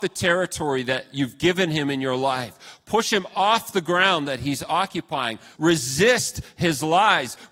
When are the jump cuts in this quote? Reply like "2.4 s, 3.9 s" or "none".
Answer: 5.6 s